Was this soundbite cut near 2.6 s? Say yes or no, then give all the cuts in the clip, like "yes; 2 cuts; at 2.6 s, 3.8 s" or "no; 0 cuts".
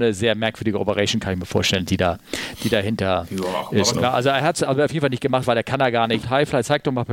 no; 2 cuts; at 3.9 s, 6.2 s